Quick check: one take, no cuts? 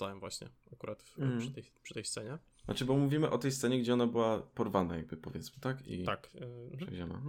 yes; 0 cuts

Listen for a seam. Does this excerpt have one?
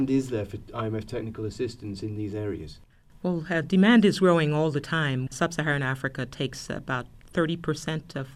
yes; 1 cut; at 5.3 s

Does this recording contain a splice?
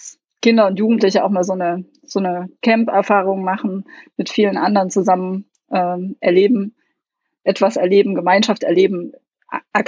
no; 0 cuts

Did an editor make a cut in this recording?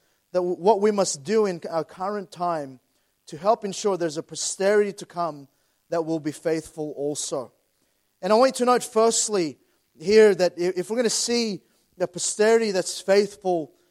no; 0 cuts

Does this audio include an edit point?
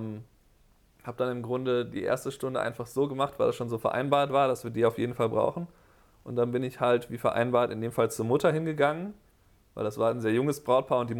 no; 0 cuts

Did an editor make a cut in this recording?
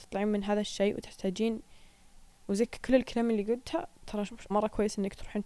yes; 1 cut; at 4.5 s

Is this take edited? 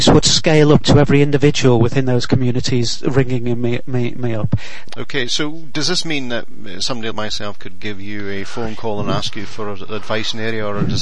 yes; 2 cuts; at 4.9 s, 7.1 s

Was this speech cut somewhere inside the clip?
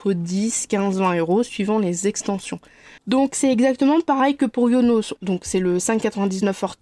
yes; 2 cuts; at 3.0 s, 5.2 s

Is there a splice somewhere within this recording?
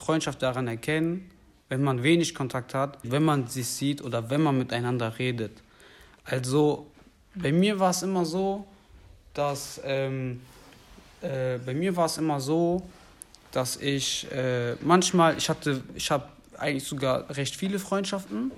yes; 1 cut; at 3.0 s

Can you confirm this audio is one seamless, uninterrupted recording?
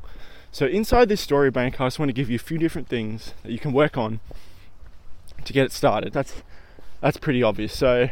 no; 2 cuts; at 6.1 s, 7.2 s

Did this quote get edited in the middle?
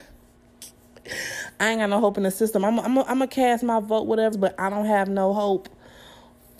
yes; 1 cut; at 4.3 s

